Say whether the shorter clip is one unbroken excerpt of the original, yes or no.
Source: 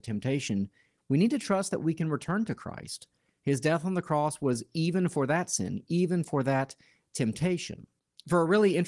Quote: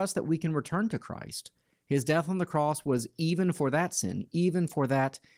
yes